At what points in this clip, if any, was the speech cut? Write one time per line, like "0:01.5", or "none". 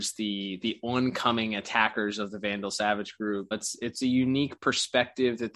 0:03.5